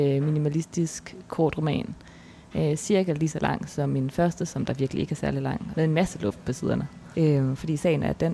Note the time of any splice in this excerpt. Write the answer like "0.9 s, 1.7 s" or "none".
5.7 s, 7.1 s